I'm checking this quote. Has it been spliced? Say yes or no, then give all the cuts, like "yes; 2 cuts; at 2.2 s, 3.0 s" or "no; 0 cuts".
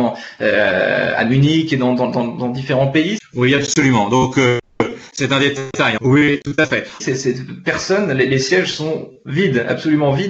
yes; 3 cuts; at 3.2 s, 6.0 s, 7.0 s